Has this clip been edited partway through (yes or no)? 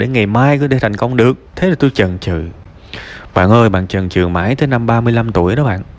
yes